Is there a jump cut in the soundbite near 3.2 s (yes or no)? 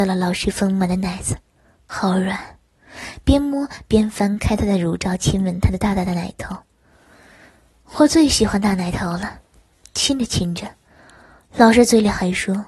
no